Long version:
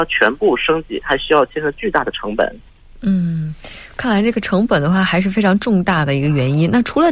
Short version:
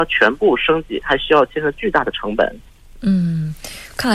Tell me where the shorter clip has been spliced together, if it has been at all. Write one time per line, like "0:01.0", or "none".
none

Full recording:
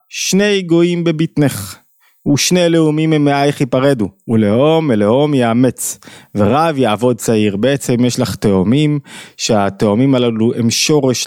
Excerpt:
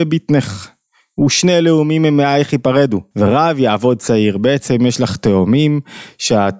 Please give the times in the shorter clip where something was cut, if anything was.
0:03.1

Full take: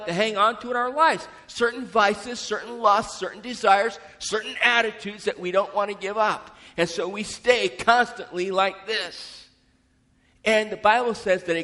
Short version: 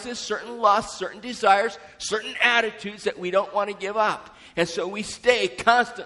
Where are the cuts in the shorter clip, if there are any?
none

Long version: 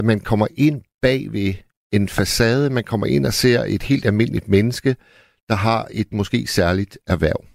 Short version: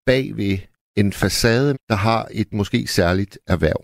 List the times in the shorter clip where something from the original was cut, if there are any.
0:01.7

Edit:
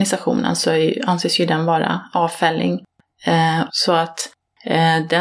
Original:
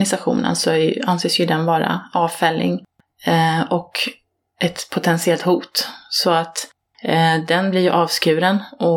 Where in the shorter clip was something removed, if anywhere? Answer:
0:03.7

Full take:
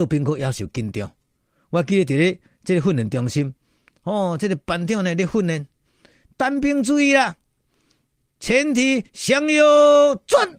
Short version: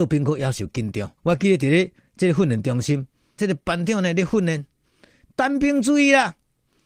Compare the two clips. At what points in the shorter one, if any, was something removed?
0:01.2
0:03.4

